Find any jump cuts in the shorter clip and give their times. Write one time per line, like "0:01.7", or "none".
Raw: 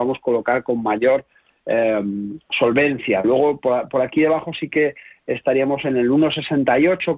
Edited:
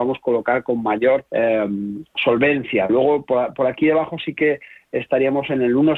0:01.3

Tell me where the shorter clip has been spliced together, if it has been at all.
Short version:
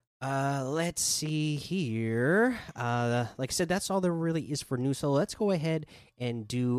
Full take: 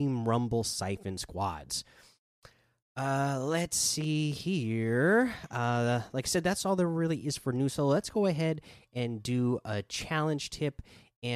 none

